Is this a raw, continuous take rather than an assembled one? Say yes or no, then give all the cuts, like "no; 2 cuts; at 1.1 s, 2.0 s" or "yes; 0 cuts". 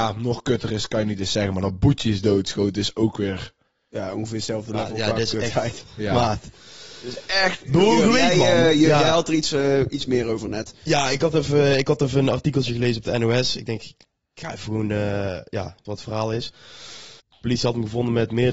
no; 2 cuts; at 15.9 s, 17.2 s